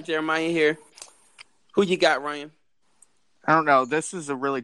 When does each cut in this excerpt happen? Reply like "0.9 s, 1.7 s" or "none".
none